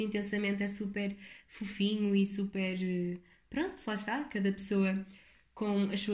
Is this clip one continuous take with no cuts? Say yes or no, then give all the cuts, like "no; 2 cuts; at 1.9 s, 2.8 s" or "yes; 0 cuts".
yes; 0 cuts